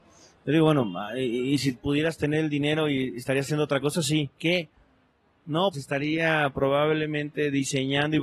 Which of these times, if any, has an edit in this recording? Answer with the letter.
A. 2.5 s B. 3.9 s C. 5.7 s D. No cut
C